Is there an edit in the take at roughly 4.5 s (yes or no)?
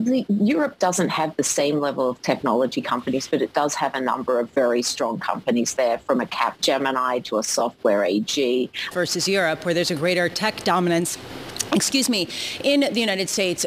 no